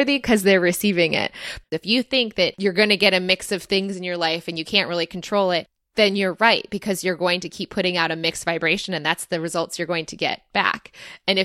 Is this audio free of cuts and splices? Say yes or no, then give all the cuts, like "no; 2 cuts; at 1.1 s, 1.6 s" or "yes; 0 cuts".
no; 1 cut; at 1.6 s